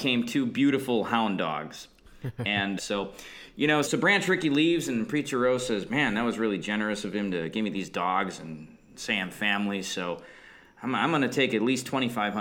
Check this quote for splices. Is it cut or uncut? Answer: cut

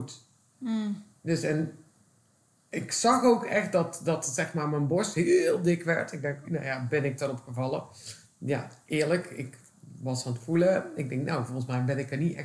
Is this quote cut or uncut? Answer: cut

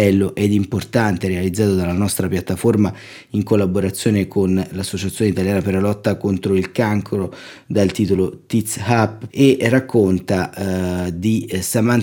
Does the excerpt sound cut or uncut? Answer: cut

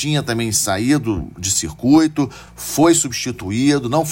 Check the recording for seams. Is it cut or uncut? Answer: uncut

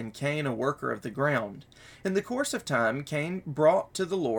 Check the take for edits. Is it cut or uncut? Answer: uncut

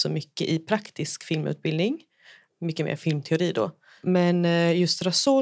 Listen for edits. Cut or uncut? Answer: uncut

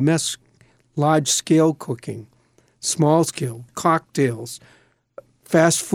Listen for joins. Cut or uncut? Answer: cut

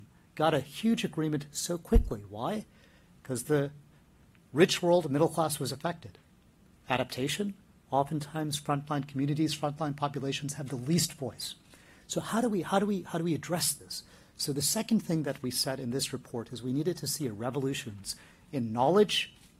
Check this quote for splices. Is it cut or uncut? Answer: uncut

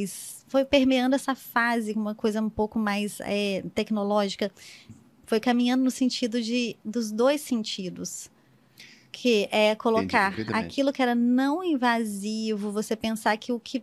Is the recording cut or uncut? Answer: cut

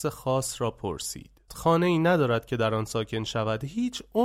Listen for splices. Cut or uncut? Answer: cut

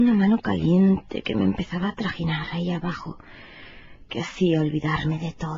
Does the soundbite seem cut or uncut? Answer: cut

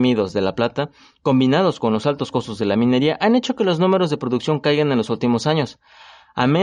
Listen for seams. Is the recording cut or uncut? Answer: uncut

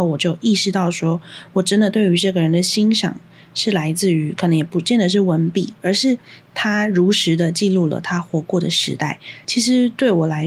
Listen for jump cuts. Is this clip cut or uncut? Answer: cut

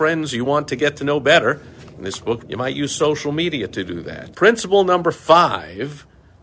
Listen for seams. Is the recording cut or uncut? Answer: cut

